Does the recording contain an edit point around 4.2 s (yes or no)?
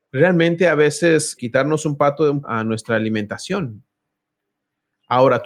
no